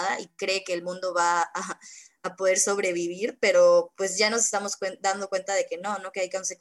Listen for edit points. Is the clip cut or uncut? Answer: uncut